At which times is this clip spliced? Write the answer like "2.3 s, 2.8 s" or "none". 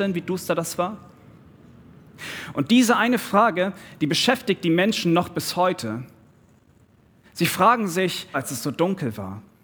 8.3 s